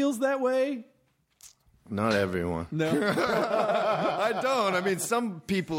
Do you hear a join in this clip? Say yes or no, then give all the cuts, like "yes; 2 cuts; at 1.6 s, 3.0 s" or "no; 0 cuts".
no; 0 cuts